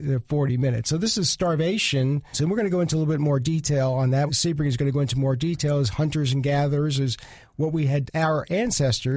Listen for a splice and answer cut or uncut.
cut